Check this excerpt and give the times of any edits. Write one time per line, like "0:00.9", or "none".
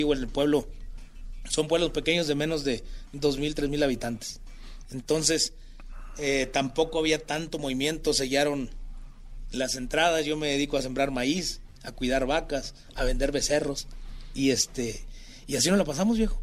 none